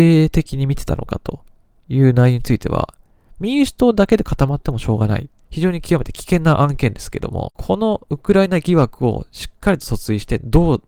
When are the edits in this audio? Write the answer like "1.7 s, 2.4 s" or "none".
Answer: 5.4 s